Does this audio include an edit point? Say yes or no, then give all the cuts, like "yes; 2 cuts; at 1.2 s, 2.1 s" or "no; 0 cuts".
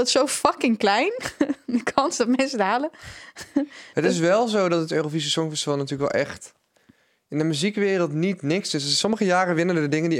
no; 0 cuts